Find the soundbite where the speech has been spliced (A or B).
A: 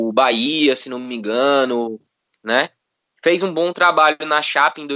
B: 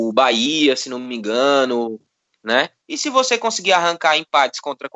B